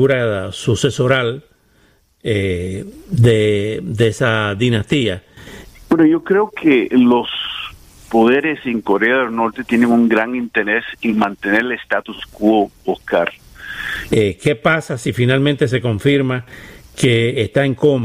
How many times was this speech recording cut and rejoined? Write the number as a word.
two